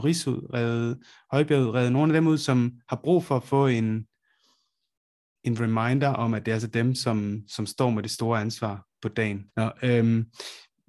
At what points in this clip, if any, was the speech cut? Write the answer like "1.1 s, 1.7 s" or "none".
9.5 s